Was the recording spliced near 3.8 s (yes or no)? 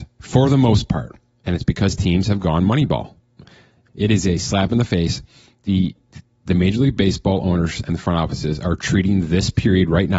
yes